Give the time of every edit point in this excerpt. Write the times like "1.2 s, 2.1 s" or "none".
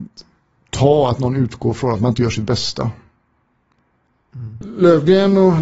4.6 s